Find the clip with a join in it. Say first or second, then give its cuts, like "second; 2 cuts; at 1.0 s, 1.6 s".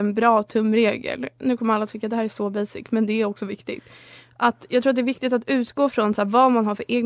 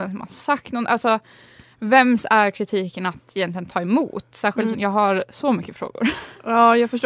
second; 1 cut; at 4.7 s